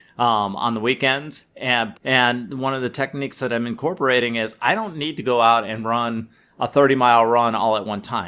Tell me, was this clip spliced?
yes; 1 cut; at 1.9 s

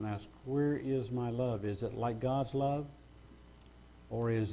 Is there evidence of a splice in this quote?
no; 0 cuts

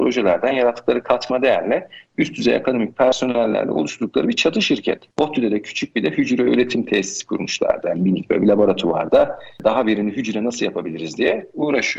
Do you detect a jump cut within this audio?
yes; 1 cut; at 5.1 s

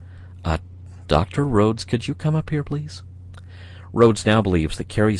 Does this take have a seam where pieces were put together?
no; 0 cuts

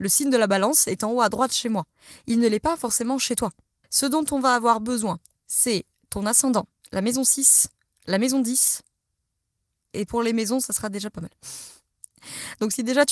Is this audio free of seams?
no; 2 cuts; at 3.8 s, 6.8 s

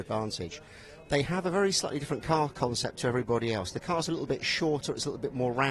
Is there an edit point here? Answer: no; 0 cuts

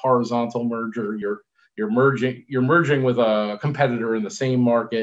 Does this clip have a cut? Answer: no; 0 cuts

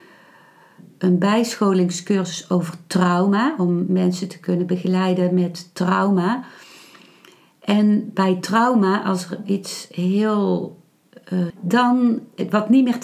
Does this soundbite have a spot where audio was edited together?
yes; 1 cut; at 11.5 s

